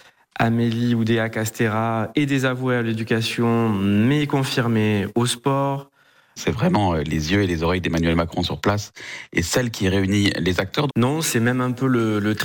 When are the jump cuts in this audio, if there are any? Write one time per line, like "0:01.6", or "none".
0:06.4
0:10.9